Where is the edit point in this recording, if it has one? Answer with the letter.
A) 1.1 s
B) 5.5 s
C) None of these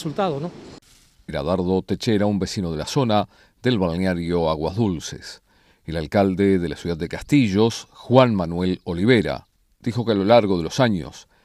C